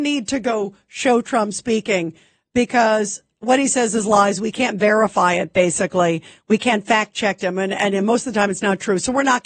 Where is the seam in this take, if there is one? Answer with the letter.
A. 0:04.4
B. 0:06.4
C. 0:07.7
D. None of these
D